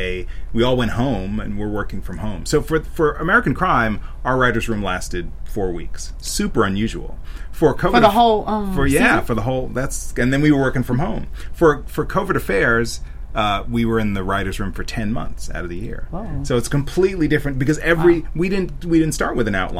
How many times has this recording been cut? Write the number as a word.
zero